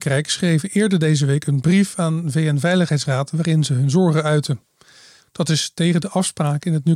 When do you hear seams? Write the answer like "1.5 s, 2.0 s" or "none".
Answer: 5.2 s

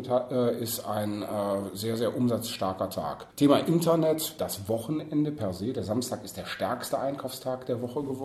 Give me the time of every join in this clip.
3.3 s, 4.4 s

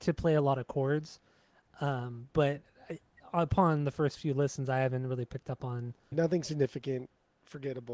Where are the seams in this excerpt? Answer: 6.1 s

